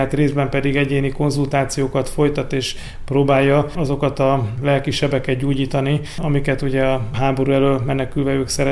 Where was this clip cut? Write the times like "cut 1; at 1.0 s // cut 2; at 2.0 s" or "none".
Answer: none